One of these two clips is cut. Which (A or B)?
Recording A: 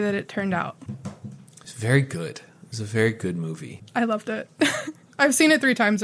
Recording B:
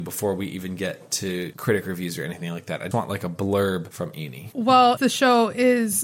B